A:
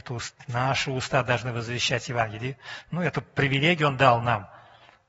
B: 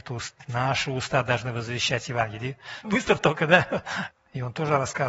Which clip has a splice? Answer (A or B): B